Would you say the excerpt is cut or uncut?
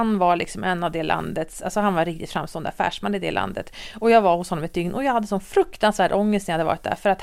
uncut